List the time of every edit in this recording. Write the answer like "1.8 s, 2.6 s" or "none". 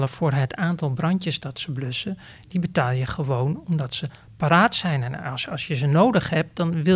none